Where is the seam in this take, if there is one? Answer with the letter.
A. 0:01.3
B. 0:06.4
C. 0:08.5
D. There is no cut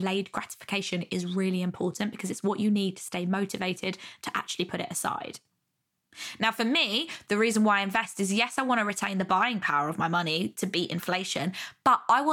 D